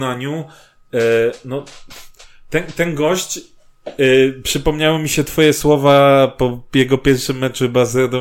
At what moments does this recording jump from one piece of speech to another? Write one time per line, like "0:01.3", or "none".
none